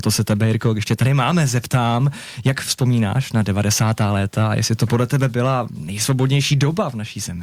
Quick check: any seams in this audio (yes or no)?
no